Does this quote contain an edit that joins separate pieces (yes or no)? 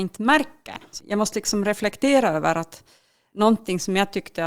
yes